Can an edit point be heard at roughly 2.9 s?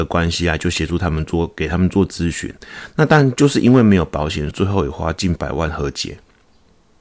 no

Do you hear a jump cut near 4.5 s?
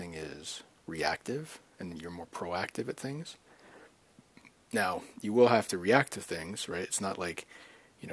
no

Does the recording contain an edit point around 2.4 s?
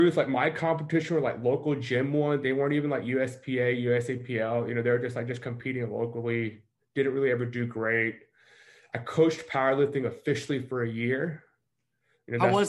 no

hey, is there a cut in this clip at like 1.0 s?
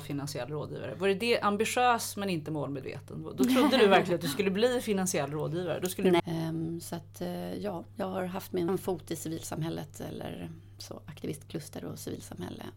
no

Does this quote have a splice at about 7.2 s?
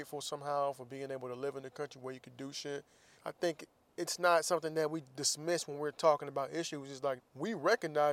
yes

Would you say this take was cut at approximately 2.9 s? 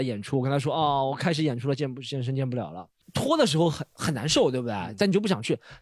no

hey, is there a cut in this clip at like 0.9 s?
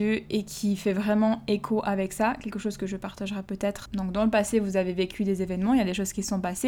no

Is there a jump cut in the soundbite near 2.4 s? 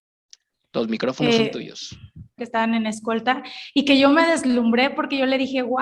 yes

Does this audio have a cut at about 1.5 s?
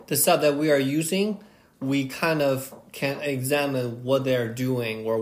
no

